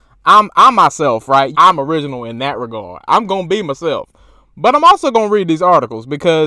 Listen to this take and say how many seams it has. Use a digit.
1